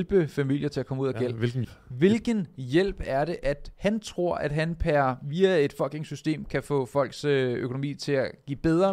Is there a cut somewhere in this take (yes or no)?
yes